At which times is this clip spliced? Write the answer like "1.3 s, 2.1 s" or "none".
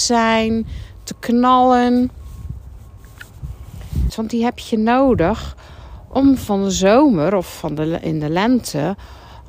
4.1 s